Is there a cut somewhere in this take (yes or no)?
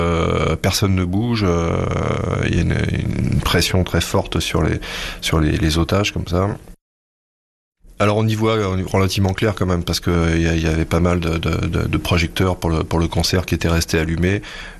no